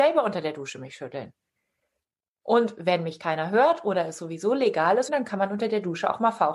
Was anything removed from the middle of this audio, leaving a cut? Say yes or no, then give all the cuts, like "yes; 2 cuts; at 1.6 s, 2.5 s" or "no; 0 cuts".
yes; 1 cut; at 5.1 s